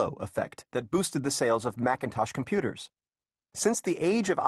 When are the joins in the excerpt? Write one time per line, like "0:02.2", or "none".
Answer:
none